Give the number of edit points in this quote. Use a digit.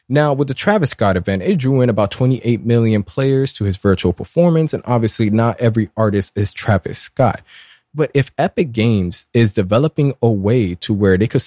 0